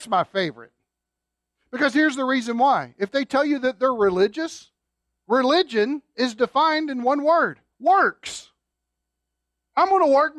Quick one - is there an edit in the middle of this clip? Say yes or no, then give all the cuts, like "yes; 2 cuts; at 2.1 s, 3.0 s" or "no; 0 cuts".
no; 0 cuts